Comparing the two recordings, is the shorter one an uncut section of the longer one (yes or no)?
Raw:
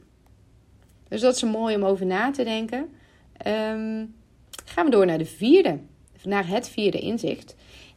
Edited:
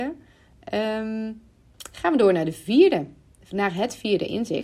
yes